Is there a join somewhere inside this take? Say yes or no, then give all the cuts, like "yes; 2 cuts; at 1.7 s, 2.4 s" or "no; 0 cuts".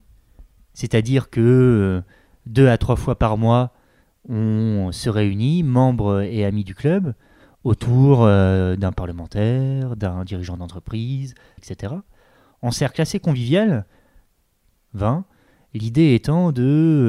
yes; 2 cuts; at 11.6 s, 14.8 s